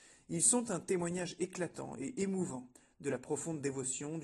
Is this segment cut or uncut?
uncut